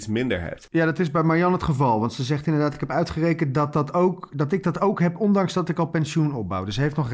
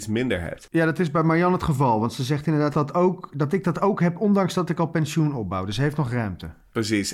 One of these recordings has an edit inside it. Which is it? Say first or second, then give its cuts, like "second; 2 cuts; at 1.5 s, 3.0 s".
second; 1 cut; at 2.7 s